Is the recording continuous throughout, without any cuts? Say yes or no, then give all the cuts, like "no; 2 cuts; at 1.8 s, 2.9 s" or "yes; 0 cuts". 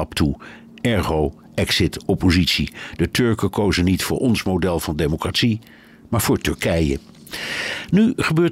yes; 0 cuts